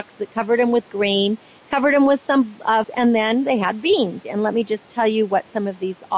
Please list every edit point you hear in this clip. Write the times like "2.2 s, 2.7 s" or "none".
2.8 s, 4.2 s